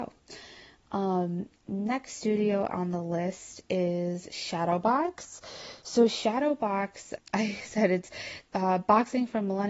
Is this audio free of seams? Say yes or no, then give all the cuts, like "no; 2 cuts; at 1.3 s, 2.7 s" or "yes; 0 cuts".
no; 2 cuts; at 7.2 s, 8.5 s